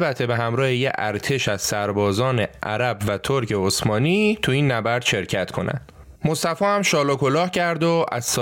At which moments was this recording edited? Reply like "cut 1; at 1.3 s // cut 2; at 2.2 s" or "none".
cut 1; at 6.2 s